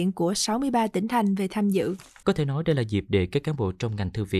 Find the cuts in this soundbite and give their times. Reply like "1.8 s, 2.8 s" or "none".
2.2 s

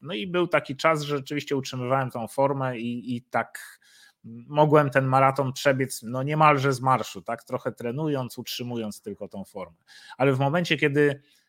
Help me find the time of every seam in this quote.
none

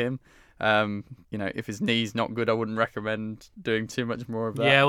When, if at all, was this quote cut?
1.2 s

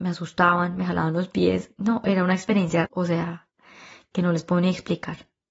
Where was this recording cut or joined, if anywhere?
2.9 s

